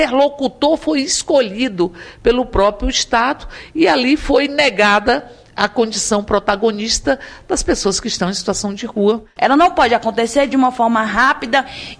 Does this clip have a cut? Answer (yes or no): yes